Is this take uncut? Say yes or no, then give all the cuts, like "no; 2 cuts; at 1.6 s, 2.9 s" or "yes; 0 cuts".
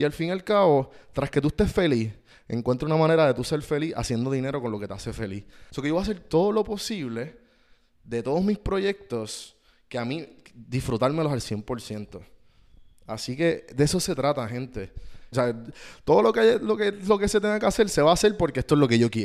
no; 2 cuts; at 5.7 s, 15.3 s